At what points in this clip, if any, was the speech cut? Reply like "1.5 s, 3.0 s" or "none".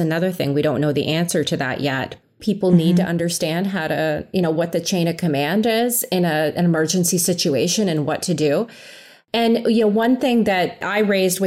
2.4 s